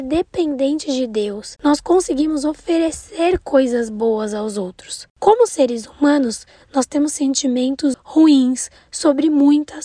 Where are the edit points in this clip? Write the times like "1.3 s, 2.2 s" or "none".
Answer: 1.6 s, 7.9 s